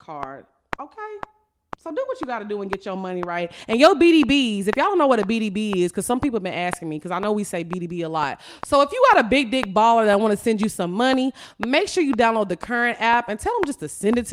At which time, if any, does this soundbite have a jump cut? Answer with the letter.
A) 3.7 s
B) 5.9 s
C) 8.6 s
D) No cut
C